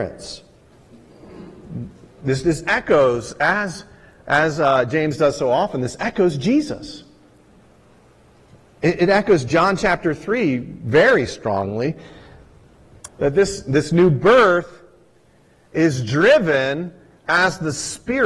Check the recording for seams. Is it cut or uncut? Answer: cut